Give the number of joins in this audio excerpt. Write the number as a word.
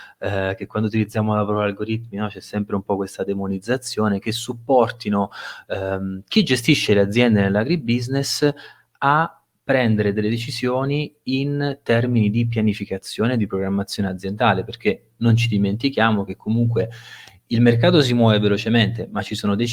zero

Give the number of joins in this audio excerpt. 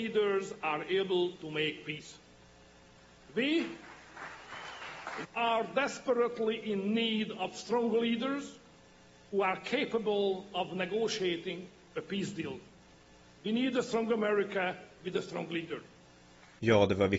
two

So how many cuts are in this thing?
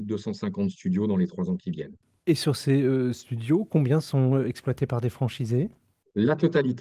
one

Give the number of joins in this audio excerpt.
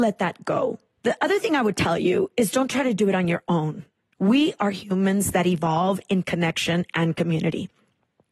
one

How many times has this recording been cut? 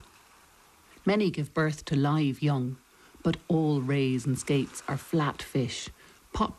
one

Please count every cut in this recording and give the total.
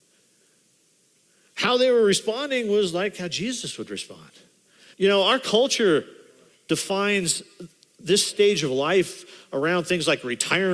one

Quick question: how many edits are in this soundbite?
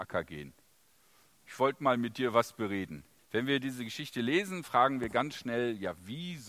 one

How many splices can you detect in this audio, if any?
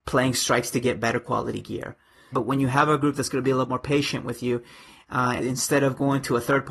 two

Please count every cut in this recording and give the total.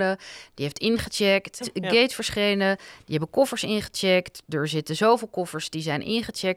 one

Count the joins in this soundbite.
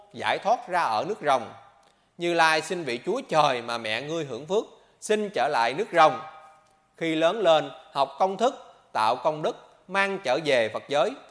zero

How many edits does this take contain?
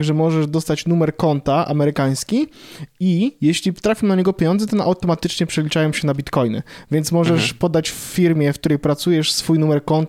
zero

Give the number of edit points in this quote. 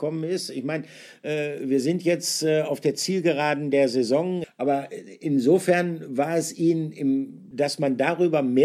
two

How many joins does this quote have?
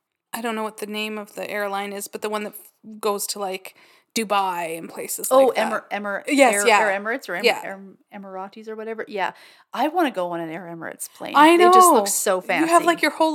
zero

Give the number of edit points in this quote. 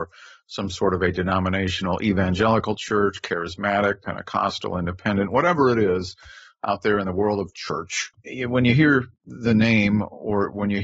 zero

